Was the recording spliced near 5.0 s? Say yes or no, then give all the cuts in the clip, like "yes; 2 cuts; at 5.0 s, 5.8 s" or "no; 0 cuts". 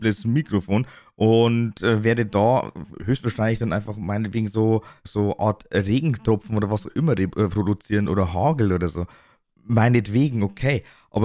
yes; 1 cut; at 5.0 s